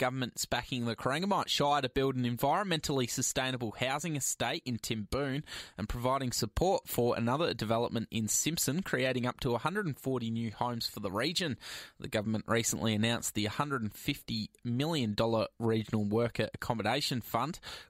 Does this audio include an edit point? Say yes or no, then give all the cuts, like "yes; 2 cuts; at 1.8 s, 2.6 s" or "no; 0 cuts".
no; 0 cuts